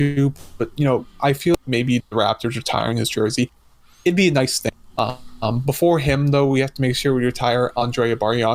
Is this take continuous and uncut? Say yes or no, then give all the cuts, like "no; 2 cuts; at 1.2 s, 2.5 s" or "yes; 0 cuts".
no; 1 cut; at 2.0 s